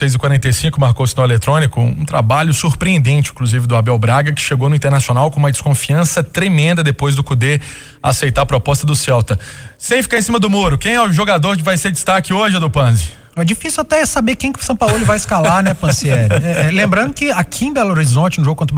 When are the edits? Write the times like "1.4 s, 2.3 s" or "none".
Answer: none